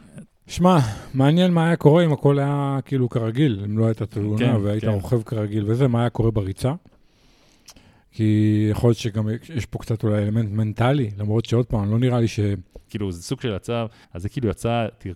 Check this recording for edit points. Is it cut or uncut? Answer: cut